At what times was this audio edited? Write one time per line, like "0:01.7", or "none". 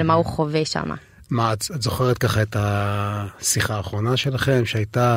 none

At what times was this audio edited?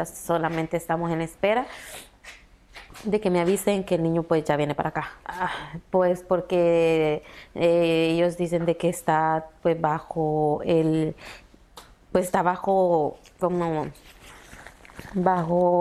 0:05.2

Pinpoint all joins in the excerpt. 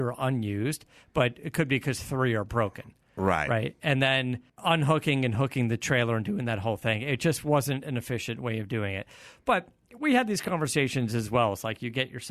0:04.5

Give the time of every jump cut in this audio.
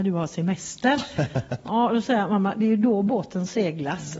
none

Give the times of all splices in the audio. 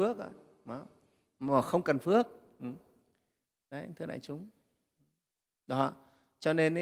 none

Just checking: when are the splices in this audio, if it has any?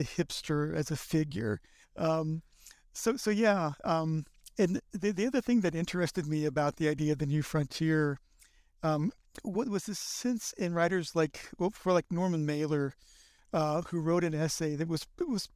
0:01.8

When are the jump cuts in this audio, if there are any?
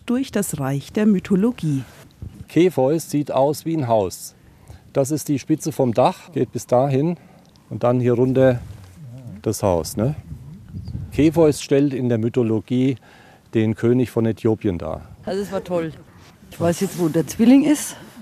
0:06.3
0:15.2

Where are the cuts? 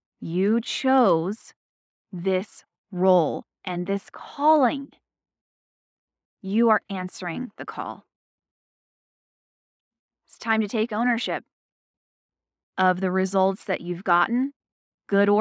none

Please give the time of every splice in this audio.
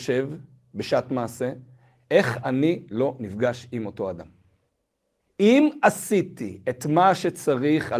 0:05.2

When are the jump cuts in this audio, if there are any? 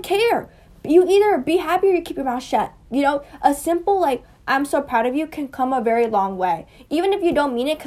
none

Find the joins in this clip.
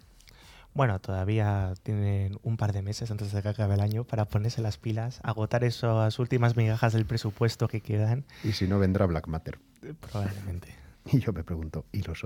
0:10.9

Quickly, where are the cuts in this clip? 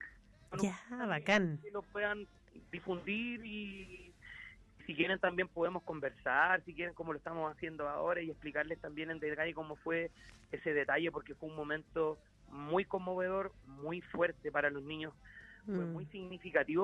none

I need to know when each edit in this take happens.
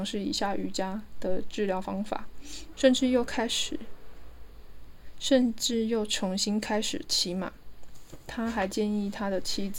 0:02.7

